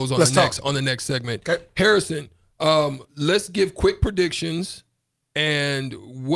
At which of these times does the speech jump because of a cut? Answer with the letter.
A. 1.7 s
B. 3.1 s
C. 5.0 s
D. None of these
B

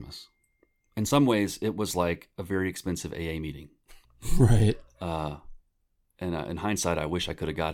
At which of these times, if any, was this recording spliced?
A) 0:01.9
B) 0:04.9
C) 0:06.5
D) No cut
D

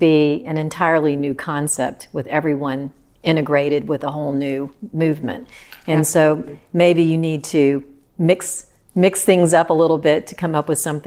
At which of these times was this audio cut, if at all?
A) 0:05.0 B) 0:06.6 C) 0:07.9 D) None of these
D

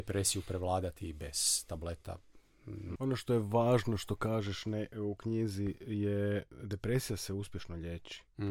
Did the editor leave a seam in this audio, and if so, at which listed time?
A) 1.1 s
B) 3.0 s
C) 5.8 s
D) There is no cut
B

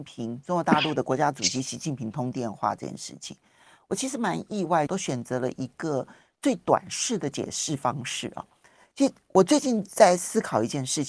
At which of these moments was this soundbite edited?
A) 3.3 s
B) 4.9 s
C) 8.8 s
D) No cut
B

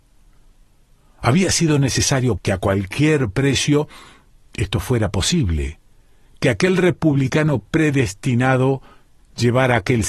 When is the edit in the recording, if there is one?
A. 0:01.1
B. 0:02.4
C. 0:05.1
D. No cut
B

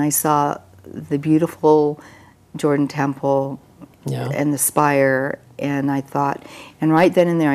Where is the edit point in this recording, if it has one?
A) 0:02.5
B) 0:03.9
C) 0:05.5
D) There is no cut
B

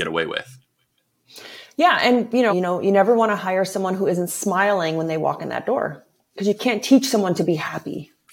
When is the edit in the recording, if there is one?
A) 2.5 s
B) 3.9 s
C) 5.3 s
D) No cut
A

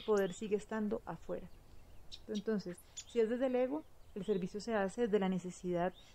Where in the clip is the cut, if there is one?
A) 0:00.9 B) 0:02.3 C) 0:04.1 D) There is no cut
B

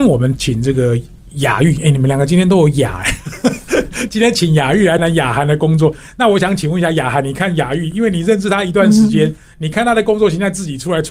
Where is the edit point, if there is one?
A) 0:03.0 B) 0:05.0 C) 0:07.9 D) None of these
B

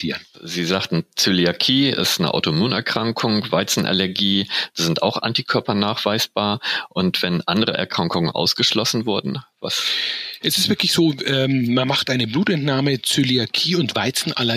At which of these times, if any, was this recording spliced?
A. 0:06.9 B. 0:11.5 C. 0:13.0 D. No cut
D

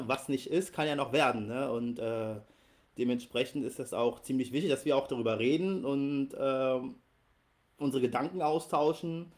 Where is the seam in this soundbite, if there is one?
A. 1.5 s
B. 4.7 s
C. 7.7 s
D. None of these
D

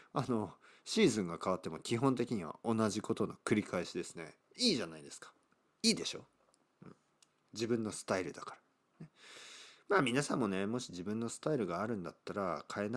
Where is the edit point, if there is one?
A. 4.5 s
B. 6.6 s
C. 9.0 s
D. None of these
D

